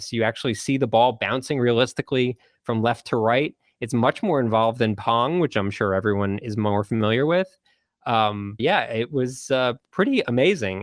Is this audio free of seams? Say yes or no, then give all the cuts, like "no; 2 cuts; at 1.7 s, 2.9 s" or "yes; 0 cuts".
no; 1 cut; at 8.6 s